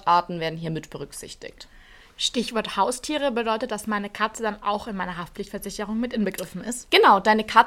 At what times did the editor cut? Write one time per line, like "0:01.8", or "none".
none

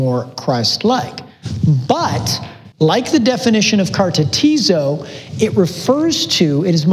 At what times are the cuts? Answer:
0:02.7

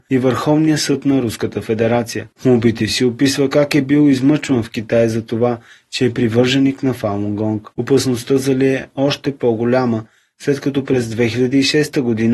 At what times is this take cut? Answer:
0:07.7

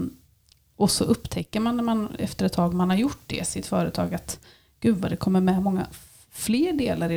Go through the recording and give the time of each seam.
none

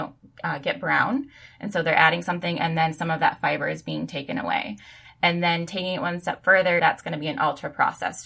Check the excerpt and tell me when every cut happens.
0:06.8

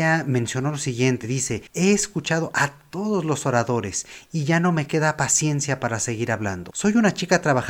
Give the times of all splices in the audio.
none

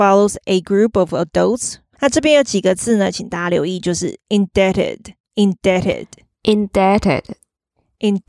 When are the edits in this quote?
0:02.0
0:05.3

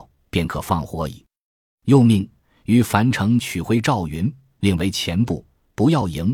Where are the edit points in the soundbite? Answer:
none

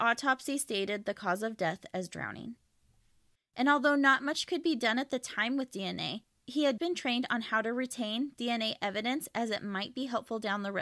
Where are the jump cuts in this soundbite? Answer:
0:03.4
0:06.8

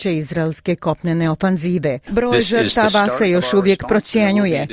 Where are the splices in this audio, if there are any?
0:02.1

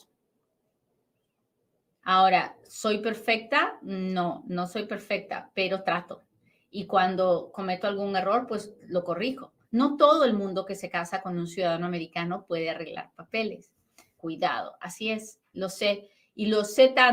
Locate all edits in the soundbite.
0:09.6
0:14.2
0:15.5

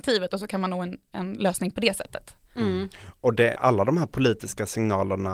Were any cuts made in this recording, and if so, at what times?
0:03.5

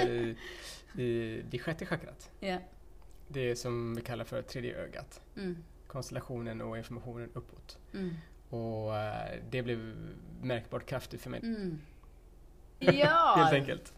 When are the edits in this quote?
0:11.4
0:12.8

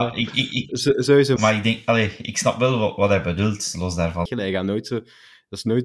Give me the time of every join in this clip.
0:01.4
0:04.3

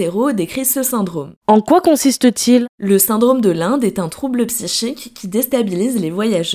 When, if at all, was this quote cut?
0:01.4

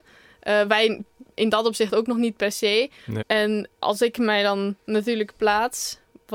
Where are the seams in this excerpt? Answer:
0:03.2

